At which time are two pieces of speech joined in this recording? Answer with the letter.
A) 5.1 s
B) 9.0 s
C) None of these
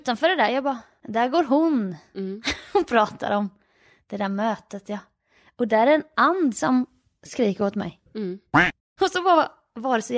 B